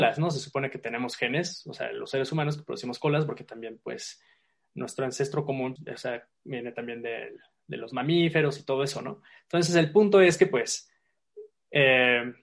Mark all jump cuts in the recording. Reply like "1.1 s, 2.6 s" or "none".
5.8 s

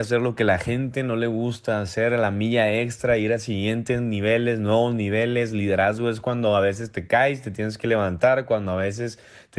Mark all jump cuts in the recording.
none

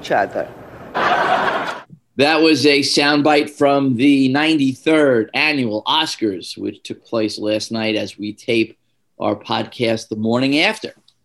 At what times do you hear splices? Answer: 0.9 s

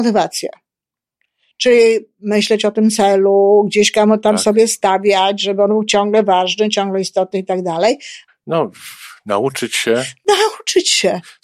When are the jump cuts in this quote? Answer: 8.3 s

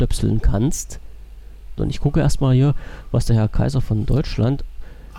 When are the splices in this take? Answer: 1.8 s

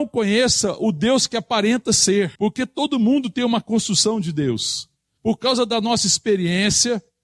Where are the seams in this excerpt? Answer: 2.3 s, 5.2 s

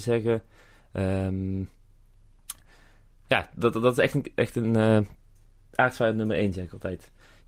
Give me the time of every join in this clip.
none

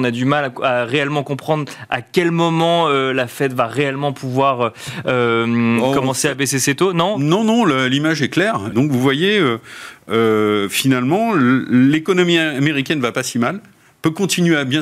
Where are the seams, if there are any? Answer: 8.7 s

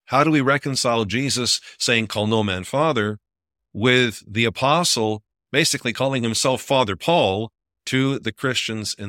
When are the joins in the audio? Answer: none

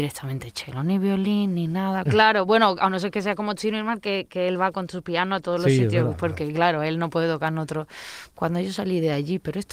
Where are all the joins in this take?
2.1 s, 8.3 s

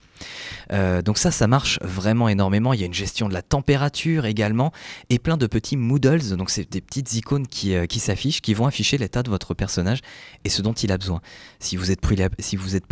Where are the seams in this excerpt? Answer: none

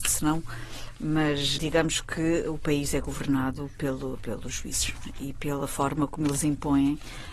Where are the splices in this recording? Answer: 1.6 s

